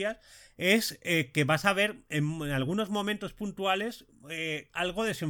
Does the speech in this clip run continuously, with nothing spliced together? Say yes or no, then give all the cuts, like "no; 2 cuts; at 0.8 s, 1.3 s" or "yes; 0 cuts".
yes; 0 cuts